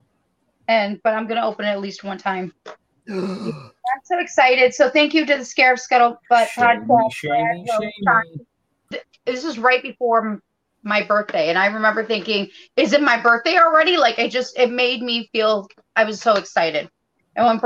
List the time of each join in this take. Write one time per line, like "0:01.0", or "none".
0:08.9